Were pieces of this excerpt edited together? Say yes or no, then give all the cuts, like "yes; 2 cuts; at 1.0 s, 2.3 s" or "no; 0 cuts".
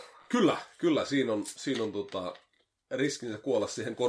no; 0 cuts